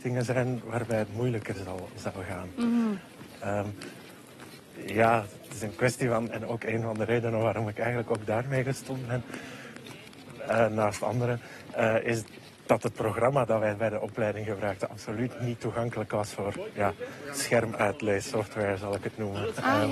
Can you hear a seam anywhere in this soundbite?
yes; 1 cut; at 6.3 s

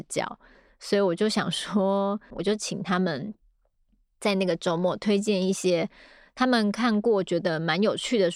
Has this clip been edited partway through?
yes; 1 cut; at 2.3 s

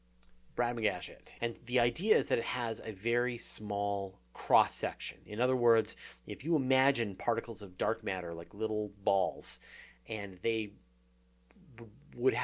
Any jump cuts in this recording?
yes; 1 cut; at 1.4 s

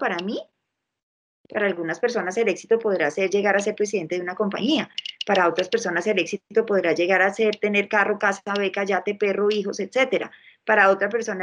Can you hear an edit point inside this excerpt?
no; 0 cuts

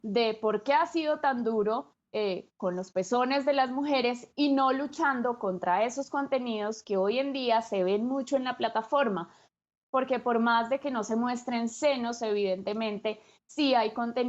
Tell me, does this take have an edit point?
no; 0 cuts

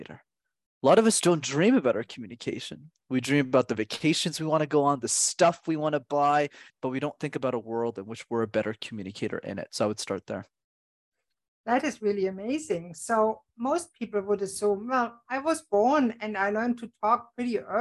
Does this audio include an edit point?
yes; 1 cut; at 6.7 s

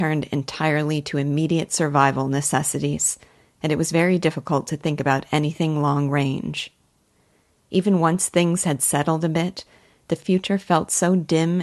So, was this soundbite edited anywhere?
no; 0 cuts

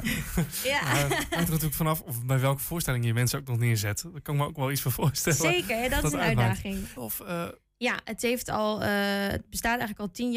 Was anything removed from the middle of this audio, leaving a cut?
yes; 1 cut; at 7.0 s

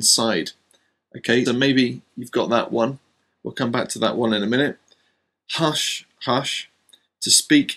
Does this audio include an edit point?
yes; 2 cuts; at 1.5 s, 6.3 s

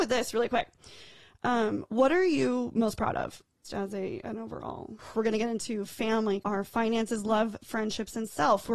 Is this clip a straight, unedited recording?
no; 3 cuts; at 3.6 s, 5.1 s, 6.4 s

